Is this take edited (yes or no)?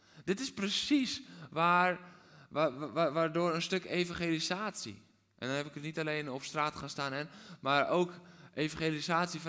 no